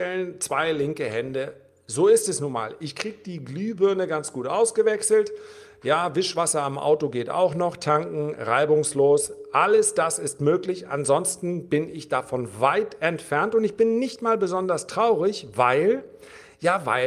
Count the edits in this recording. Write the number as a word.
zero